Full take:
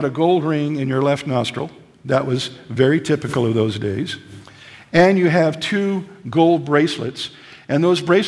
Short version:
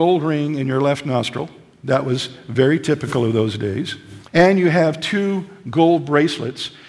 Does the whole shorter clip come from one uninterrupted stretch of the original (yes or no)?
no